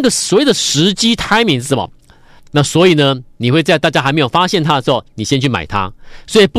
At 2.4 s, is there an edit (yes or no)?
yes